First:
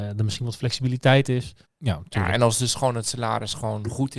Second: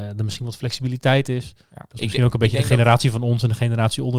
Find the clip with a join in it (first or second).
first